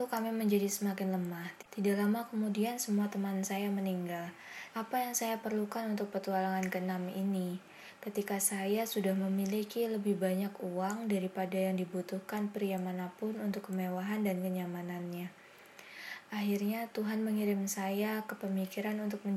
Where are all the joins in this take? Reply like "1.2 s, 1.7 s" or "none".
4.7 s

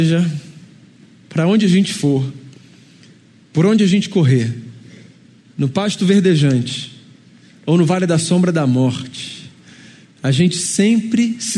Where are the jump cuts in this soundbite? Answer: none

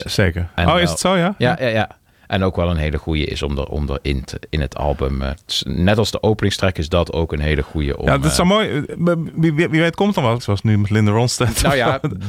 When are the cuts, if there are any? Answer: 10.4 s

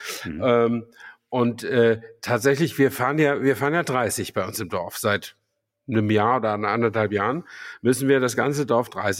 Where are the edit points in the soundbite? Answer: none

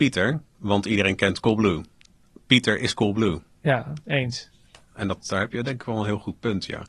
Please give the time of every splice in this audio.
4.9 s

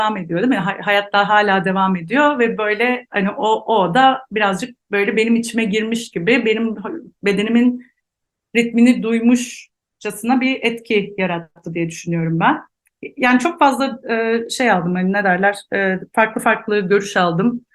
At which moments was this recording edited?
none

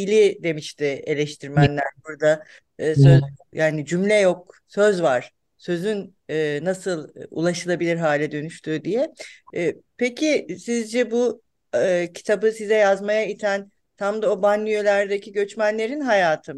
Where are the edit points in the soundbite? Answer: 3.5 s, 6.2 s

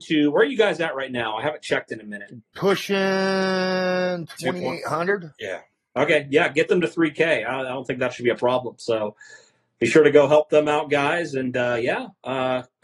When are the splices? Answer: none

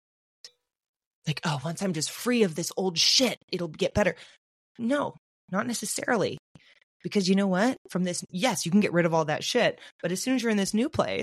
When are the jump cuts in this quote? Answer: none

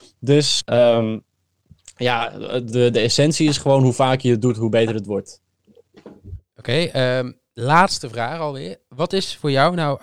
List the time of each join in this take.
none

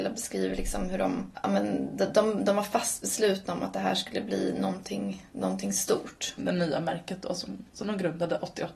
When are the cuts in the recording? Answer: 6.4 s

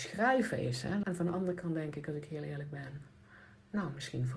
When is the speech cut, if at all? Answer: 1.0 s

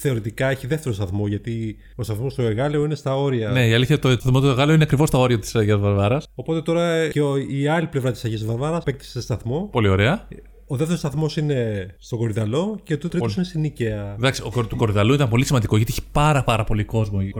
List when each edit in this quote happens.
none

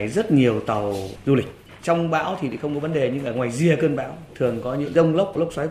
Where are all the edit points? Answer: none

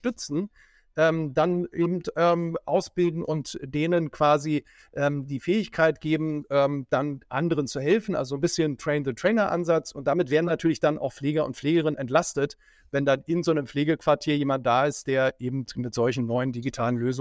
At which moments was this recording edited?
none

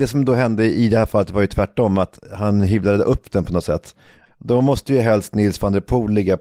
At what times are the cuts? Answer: 4.3 s

